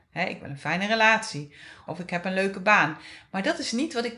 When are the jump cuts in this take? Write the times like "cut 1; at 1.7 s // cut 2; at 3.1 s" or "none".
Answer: cut 1; at 1.9 s